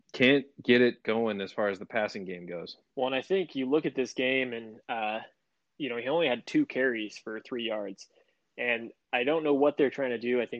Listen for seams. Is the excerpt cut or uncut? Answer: uncut